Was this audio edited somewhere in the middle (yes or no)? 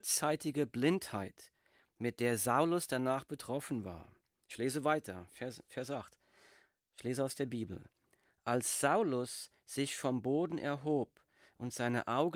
no